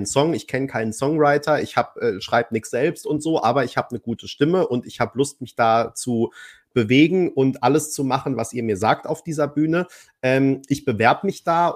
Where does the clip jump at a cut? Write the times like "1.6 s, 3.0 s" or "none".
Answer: none